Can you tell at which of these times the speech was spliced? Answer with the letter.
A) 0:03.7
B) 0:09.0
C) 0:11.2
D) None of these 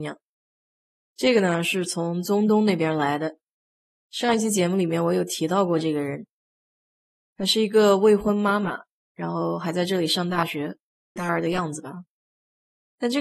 C